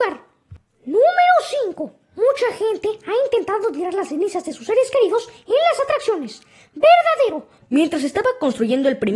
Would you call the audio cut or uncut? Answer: cut